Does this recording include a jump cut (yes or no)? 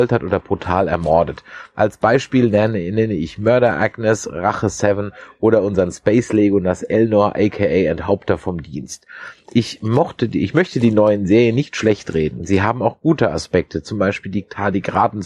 no